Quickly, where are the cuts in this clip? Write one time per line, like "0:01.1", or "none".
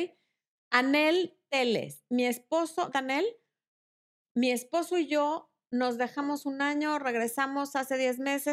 0:02.9